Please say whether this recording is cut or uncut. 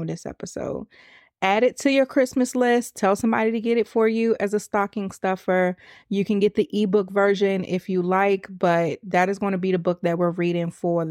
uncut